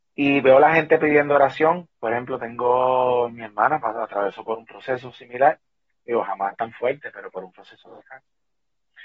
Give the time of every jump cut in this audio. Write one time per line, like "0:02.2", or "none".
none